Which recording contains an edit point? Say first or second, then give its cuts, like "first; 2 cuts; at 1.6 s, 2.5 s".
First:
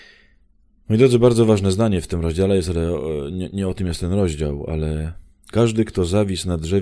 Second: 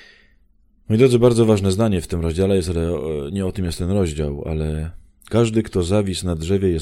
second; 1 cut; at 3.3 s